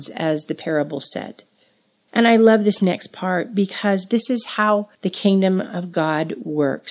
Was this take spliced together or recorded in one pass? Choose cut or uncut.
cut